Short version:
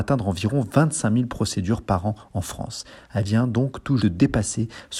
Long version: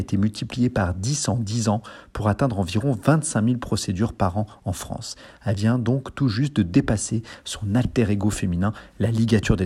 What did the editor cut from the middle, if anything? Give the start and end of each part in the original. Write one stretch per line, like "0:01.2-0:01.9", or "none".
0:06.3-0:06.5